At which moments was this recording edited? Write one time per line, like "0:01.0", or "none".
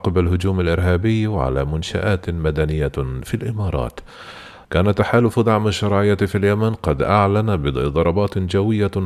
0:04.6